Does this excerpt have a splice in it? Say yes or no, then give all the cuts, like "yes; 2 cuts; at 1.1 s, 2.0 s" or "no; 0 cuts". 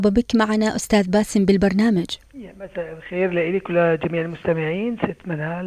yes; 1 cut; at 2.2 s